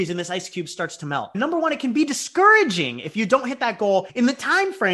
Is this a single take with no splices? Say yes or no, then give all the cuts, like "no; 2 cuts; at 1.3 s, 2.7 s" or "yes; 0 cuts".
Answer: no; 1 cut; at 1.3 s